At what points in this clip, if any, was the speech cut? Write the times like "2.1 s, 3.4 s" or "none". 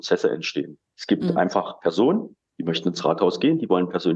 0.9 s